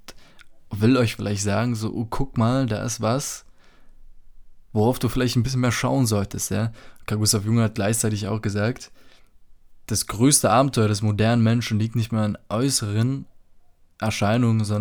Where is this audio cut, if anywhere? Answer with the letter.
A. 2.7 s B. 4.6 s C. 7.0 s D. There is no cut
D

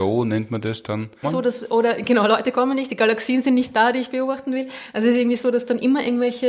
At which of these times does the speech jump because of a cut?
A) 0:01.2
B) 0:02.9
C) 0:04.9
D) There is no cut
A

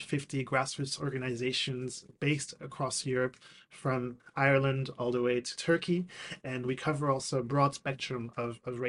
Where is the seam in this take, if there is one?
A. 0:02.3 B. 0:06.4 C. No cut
B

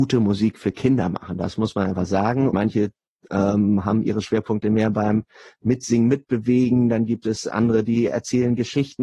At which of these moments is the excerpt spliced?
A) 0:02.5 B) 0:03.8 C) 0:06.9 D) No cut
A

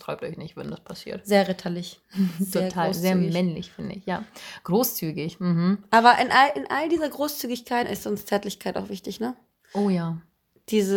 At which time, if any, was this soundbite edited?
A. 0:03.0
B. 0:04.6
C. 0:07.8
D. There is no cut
C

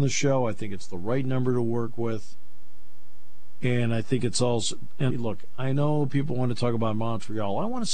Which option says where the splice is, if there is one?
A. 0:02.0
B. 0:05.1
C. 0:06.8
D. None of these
B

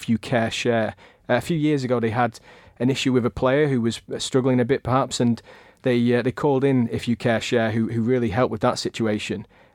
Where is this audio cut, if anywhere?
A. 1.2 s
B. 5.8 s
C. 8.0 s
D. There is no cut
A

